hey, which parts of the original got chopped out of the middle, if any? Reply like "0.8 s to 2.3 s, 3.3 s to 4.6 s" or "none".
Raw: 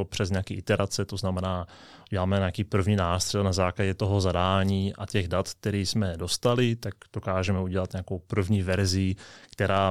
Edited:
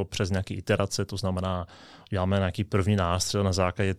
none